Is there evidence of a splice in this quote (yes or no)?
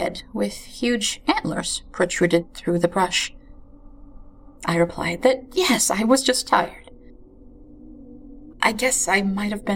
yes